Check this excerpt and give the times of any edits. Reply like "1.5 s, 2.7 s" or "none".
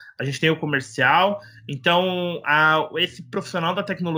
none